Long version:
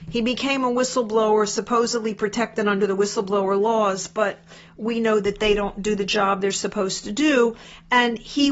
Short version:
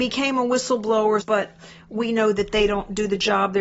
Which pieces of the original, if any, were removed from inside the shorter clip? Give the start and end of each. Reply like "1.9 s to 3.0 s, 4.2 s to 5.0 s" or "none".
1.5 s to 4.1 s